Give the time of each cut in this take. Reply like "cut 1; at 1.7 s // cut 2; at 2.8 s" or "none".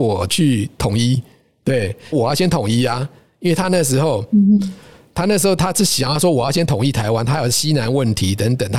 cut 1; at 2.1 s